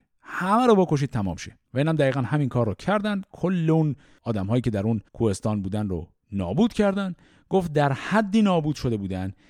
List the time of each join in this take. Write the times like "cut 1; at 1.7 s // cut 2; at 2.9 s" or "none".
cut 1; at 1.6 s // cut 2; at 5.1 s